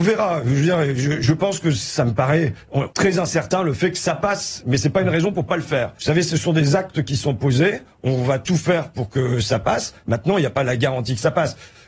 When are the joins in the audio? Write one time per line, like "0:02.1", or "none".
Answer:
0:02.9
0:06.0